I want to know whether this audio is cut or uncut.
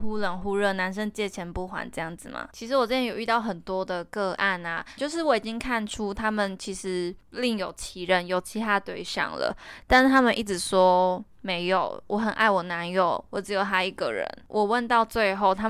cut